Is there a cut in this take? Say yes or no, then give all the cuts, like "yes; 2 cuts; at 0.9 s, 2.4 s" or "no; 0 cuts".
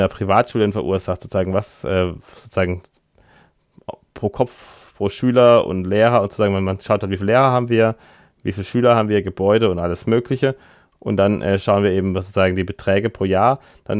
no; 0 cuts